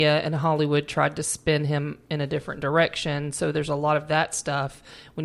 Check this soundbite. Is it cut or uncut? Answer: uncut